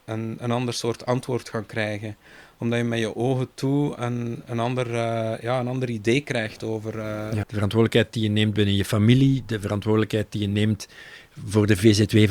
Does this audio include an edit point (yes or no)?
yes